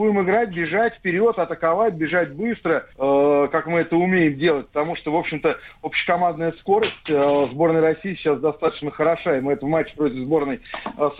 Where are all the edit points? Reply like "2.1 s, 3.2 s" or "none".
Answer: 2.9 s